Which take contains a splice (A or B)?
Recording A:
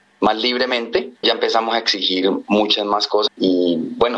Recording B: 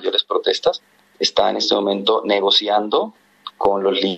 A